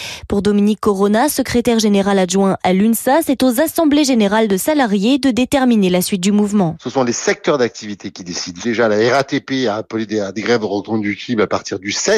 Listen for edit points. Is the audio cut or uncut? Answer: uncut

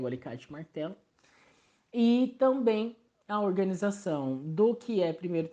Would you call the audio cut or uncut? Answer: uncut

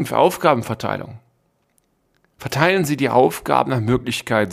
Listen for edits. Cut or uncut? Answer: uncut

